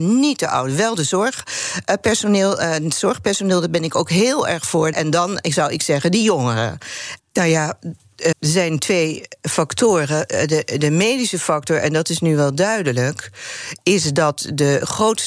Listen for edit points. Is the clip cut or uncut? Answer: cut